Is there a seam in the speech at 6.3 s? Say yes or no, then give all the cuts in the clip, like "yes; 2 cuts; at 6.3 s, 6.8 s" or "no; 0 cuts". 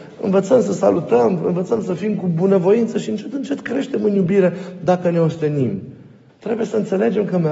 yes; 1 cut; at 6.3 s